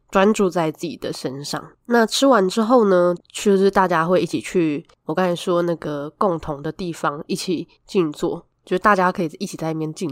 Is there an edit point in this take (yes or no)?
yes